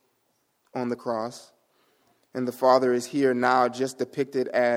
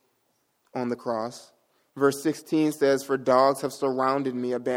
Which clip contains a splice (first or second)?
second